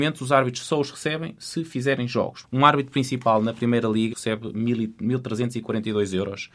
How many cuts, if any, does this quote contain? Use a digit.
2